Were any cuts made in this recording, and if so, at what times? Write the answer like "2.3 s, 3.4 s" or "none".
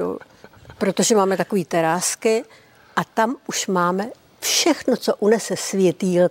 none